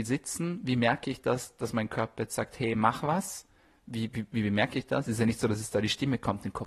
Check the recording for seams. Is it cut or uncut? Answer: uncut